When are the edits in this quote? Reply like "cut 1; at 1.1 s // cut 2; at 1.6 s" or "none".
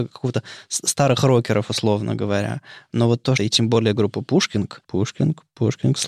cut 1; at 3.4 s // cut 2; at 4.8 s